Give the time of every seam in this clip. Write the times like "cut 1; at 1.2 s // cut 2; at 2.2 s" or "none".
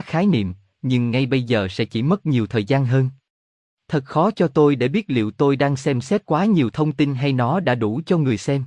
none